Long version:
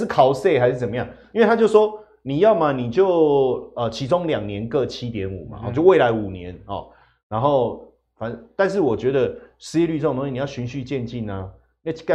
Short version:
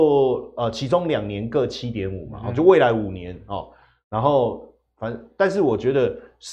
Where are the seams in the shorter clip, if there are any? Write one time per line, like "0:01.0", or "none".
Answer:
none